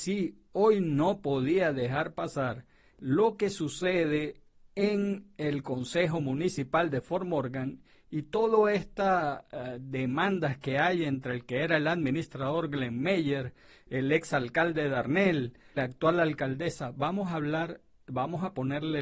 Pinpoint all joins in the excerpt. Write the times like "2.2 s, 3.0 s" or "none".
15.8 s